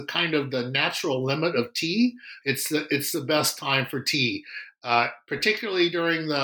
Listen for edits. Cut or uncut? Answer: cut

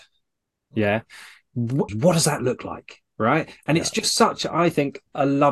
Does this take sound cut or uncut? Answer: cut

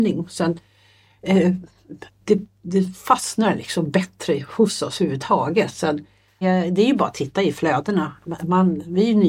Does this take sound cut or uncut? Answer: cut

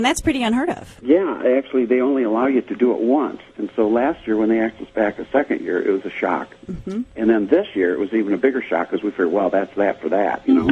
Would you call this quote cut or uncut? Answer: uncut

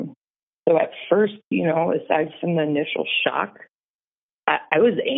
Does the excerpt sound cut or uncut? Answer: uncut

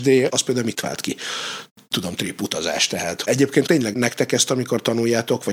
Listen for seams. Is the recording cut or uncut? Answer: uncut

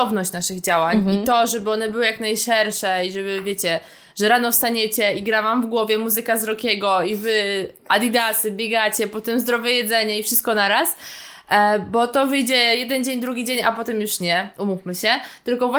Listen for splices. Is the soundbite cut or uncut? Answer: uncut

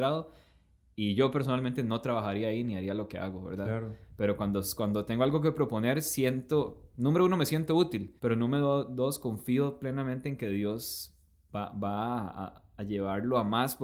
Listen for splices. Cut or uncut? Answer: cut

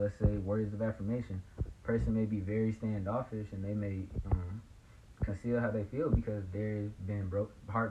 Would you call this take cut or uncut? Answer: uncut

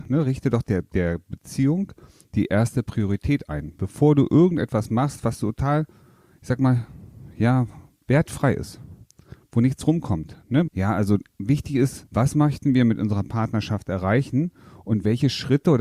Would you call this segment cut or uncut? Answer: cut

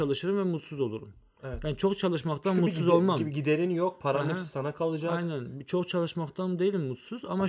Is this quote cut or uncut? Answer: uncut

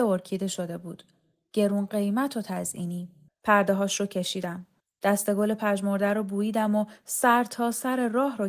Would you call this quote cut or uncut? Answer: cut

